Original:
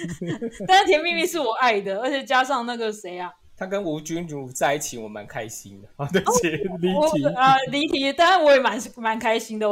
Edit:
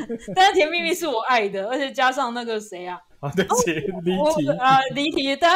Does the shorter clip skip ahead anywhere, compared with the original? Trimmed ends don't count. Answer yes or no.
yes